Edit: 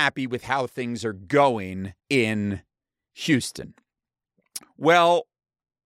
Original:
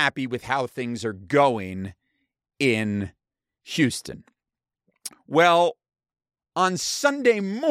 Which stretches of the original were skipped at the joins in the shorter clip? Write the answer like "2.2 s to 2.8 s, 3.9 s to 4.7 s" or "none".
2.0 s to 2.5 s